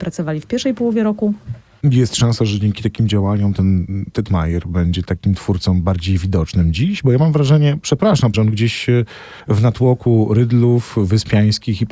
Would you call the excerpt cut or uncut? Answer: cut